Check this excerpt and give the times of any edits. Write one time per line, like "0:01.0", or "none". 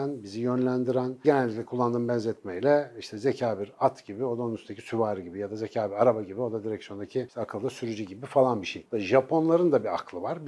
0:08.9